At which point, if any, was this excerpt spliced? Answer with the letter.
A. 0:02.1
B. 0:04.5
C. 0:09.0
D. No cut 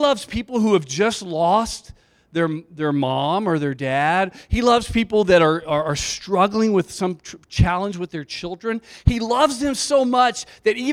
D